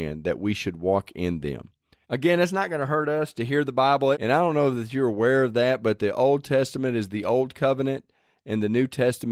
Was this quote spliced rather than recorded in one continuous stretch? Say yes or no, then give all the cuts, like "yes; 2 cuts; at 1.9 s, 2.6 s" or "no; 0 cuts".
yes; 2 cuts; at 2.0 s, 4.1 s